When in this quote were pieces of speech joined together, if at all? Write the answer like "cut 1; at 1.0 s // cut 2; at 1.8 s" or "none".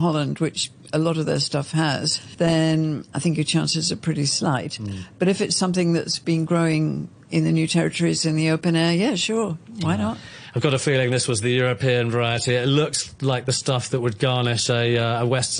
none